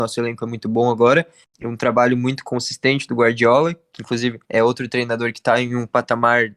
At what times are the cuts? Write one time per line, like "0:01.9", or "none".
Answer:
0:01.4
0:04.4